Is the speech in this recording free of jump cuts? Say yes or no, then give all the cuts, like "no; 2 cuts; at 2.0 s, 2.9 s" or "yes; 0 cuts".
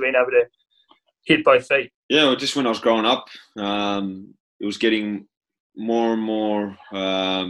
no; 2 cuts; at 2.0 s, 4.4 s